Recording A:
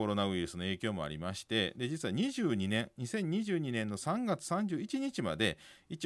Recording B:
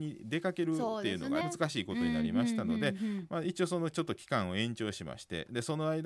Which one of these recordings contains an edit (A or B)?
B